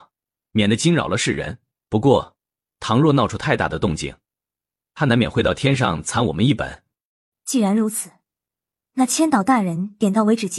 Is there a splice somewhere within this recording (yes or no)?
yes